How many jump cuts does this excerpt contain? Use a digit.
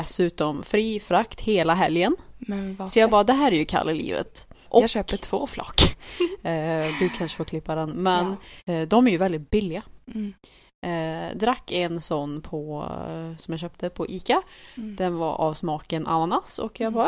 2